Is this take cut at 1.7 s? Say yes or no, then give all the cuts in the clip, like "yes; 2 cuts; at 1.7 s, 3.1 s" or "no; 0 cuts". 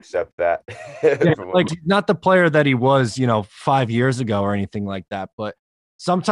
yes; 1 cut; at 1.7 s